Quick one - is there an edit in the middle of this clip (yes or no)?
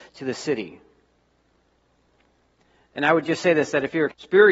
no